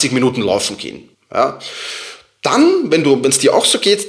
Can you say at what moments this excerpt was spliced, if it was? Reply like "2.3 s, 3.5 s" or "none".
1.1 s